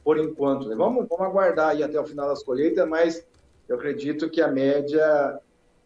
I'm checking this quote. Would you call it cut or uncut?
uncut